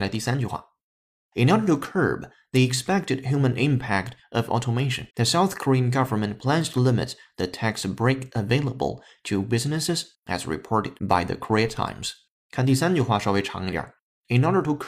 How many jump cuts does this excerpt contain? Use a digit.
1